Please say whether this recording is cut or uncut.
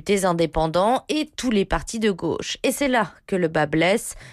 uncut